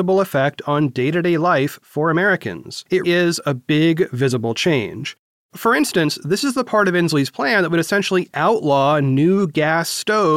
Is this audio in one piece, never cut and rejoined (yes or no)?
no